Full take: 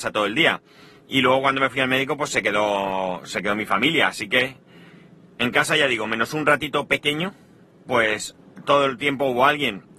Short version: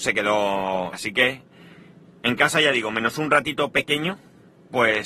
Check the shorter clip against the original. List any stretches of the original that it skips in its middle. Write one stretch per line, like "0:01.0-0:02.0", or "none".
0:03.2-0:04.1